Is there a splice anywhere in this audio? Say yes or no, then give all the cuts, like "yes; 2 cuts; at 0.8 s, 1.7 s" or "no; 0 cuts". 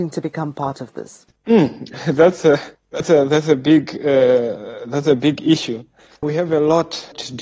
no; 0 cuts